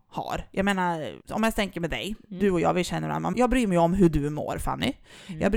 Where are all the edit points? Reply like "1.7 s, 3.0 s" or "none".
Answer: 1.2 s, 3.3 s